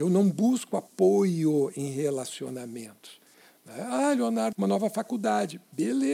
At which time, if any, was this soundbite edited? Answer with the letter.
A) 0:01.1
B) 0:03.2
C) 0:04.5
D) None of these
C